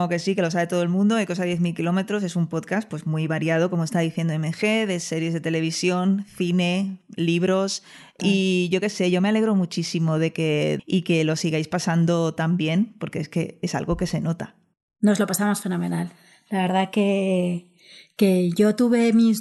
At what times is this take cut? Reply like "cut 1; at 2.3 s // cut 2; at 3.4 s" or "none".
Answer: cut 1; at 10.8 s